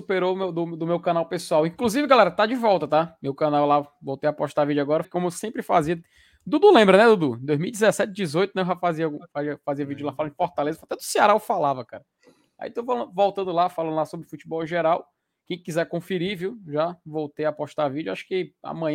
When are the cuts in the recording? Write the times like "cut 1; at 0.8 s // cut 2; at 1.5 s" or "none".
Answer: cut 1; at 5.0 s